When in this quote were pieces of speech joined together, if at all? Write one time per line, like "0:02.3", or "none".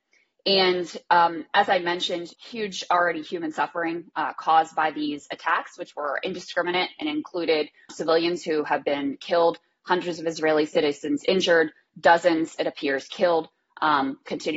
0:02.3
0:07.9